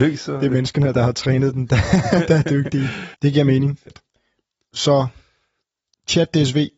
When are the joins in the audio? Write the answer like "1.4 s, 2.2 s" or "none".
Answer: 3.1 s